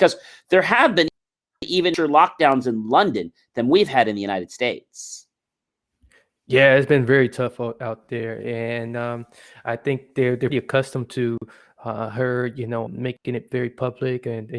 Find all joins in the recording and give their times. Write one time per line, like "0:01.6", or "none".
0:10.5
0:12.9

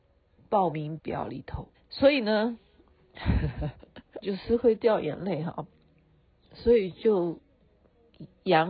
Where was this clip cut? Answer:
0:01.7
0:04.2

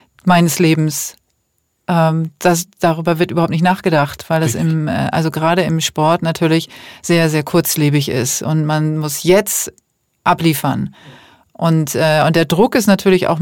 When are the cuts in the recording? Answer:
none

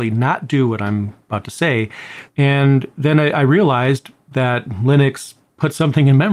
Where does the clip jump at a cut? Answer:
0:02.3

